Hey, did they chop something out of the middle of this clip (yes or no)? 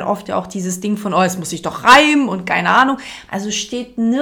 yes